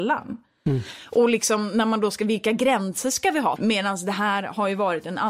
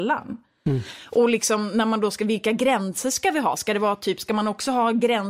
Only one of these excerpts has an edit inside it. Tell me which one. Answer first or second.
first